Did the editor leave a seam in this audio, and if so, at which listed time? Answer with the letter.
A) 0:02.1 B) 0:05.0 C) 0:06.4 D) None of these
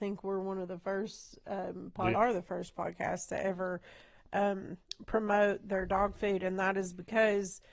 A